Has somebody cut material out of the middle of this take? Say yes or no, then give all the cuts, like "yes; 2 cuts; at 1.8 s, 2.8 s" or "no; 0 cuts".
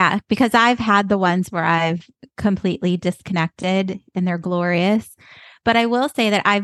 no; 0 cuts